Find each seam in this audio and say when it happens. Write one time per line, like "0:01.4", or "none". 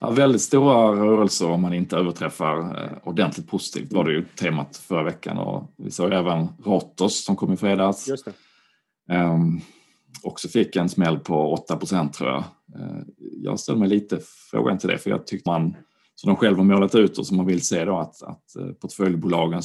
0:15.5